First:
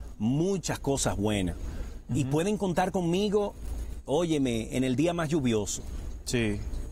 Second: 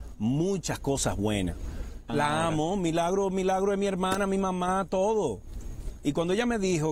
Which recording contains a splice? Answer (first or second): second